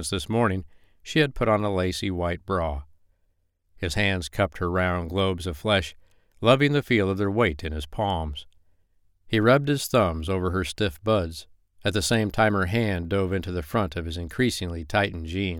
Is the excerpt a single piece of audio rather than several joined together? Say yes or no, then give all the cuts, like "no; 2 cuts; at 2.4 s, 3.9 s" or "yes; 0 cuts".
yes; 0 cuts